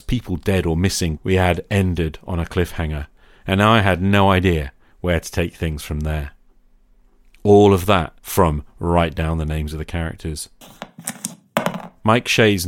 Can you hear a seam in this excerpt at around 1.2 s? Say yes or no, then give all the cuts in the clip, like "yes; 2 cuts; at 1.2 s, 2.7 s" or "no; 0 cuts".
yes; 2 cuts; at 1.2 s, 8.2 s